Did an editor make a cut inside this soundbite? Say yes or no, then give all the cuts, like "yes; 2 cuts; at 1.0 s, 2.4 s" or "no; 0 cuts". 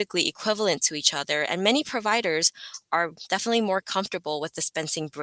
no; 0 cuts